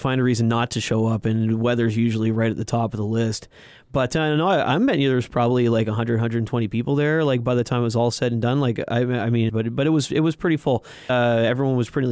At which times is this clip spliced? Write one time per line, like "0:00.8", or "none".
0:09.5
0:11.1